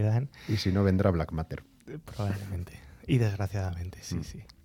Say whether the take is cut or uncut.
uncut